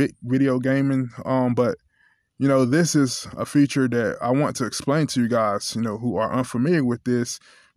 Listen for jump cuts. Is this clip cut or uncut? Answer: uncut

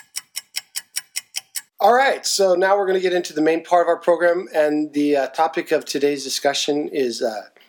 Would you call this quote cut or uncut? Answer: uncut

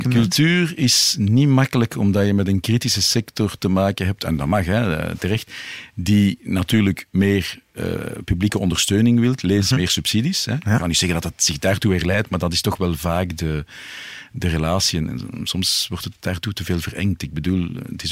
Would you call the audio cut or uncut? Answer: uncut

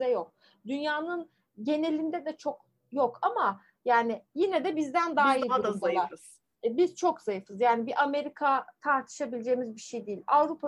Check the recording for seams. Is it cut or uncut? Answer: uncut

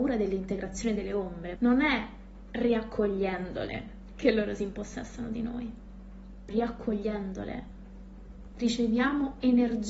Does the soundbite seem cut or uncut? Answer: cut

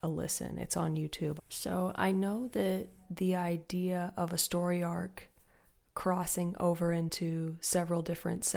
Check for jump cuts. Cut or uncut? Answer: cut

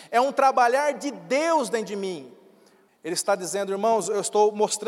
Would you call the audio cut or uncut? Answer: cut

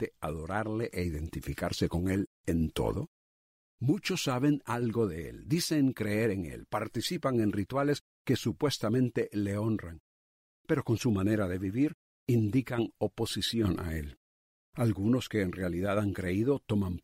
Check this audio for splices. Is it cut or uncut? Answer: uncut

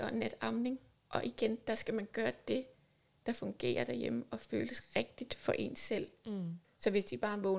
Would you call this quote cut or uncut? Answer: cut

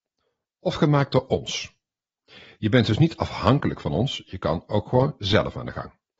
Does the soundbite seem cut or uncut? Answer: uncut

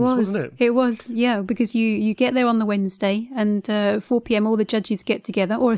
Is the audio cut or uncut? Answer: uncut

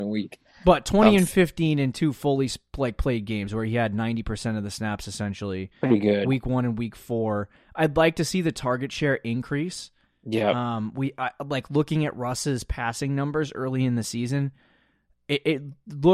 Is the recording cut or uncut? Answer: uncut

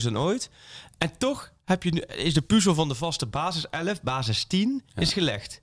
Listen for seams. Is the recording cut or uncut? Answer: uncut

